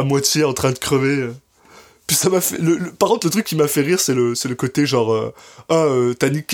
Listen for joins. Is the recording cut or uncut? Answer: uncut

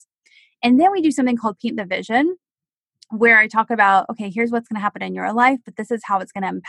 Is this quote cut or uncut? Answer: uncut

